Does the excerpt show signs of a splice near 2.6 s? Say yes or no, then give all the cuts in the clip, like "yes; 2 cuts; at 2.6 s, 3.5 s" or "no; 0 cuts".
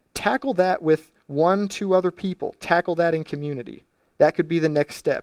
no; 0 cuts